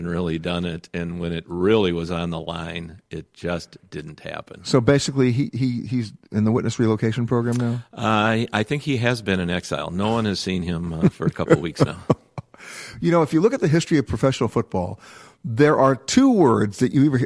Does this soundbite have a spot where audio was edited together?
no; 0 cuts

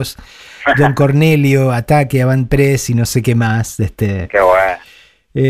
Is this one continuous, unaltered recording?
yes; 0 cuts

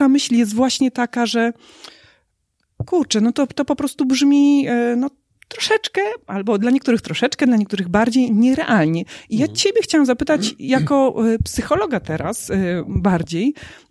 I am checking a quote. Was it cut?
no; 0 cuts

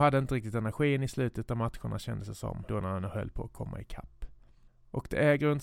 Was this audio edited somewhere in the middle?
yes; 1 cut; at 2.7 s

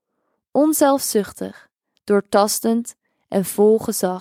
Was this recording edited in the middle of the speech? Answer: yes; 1 cut; at 2.0 s

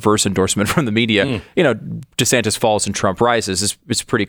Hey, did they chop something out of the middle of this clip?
no; 0 cuts

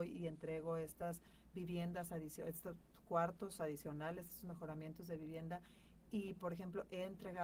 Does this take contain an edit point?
no; 0 cuts

